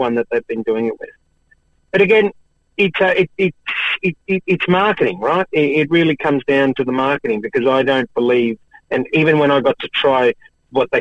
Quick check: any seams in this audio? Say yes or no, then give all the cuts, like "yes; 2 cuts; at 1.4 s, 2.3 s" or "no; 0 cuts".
yes; 1 cut; at 4.2 s